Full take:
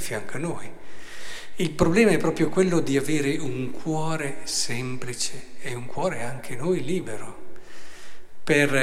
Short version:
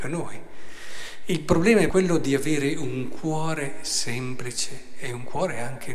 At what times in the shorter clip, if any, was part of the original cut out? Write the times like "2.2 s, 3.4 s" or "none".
1.9 s